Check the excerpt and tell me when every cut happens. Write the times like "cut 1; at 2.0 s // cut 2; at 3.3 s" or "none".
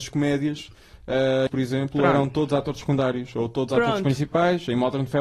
cut 1; at 1.5 s